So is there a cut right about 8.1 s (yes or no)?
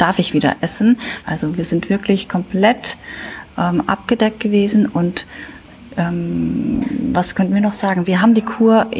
no